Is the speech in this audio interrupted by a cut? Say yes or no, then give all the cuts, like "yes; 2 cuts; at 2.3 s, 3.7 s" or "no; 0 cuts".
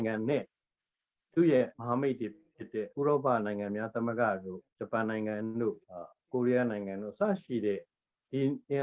yes; 3 cuts; at 1.7 s, 4.7 s, 5.8 s